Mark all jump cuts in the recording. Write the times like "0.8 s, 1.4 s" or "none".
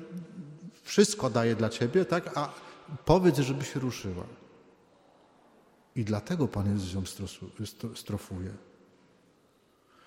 none